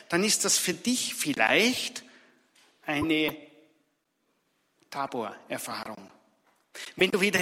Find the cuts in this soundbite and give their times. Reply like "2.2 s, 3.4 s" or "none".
none